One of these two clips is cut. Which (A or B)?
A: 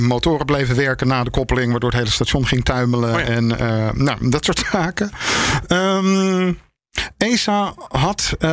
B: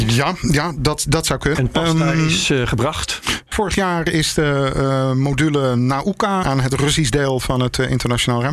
B